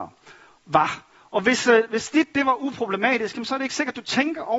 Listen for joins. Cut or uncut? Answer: uncut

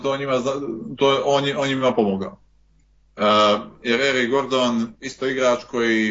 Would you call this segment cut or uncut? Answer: uncut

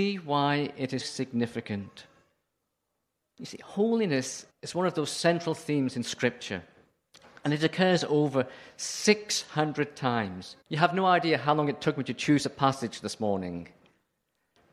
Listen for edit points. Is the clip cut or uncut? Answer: cut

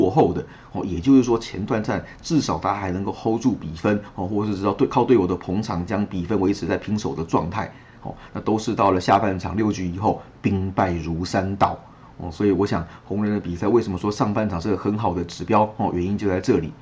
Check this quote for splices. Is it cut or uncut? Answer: uncut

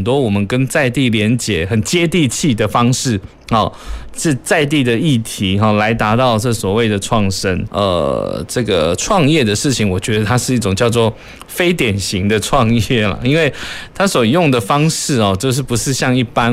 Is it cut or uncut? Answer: cut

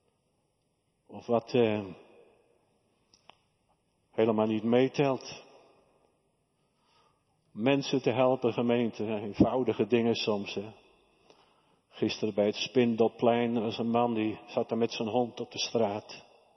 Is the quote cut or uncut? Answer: uncut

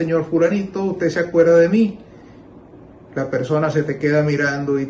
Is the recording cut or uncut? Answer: uncut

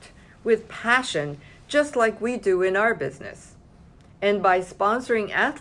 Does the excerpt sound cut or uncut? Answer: uncut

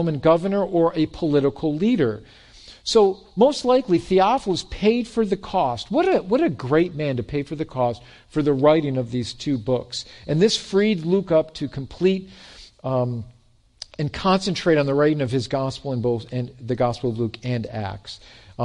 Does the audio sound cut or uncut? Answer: uncut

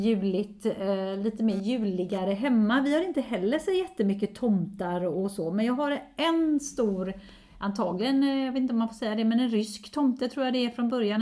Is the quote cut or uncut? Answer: uncut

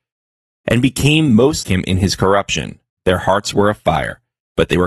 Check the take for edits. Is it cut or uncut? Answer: cut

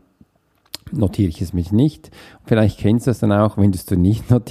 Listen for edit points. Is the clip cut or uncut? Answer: uncut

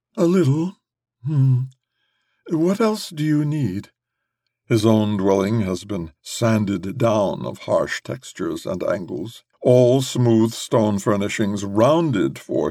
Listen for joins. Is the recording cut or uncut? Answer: cut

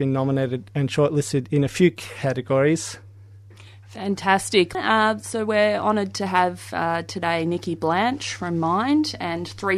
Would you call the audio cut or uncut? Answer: cut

